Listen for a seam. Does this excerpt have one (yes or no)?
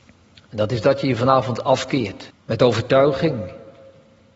yes